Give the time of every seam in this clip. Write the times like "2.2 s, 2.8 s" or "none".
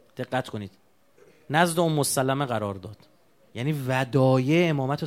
none